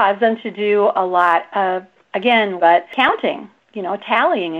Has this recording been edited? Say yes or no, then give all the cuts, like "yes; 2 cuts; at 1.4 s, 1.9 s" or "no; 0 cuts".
yes; 1 cut; at 2.6 s